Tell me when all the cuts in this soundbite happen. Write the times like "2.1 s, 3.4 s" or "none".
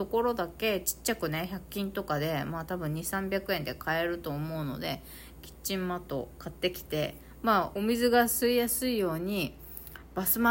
7.7 s

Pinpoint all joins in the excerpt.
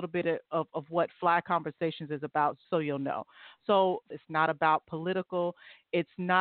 2.6 s, 4.1 s

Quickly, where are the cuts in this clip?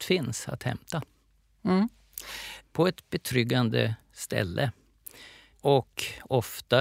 2.7 s

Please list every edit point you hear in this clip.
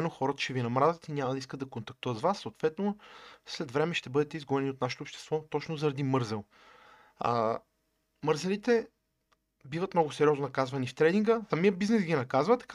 11.5 s

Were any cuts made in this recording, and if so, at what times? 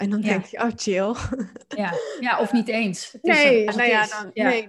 3.7 s

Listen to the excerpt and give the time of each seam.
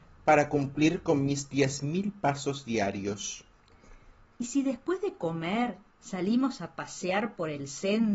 4.3 s

